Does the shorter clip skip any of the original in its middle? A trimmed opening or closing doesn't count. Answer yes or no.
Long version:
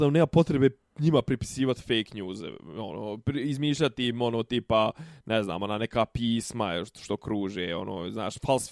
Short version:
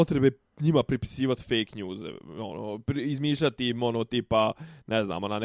no